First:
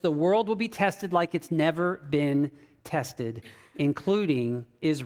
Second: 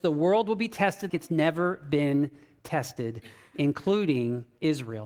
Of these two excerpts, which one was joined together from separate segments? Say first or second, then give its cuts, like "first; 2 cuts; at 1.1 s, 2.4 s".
second; 1 cut; at 1.1 s